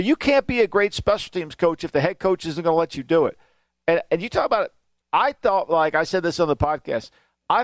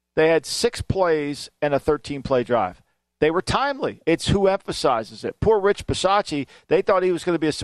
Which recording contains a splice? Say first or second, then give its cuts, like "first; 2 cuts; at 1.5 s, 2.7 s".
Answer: second; 1 cut; at 4.0 s